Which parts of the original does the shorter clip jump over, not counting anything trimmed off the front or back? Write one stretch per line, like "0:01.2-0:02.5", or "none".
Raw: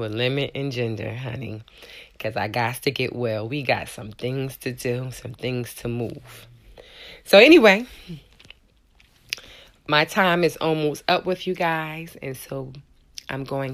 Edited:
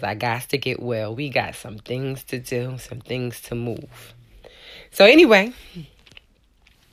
none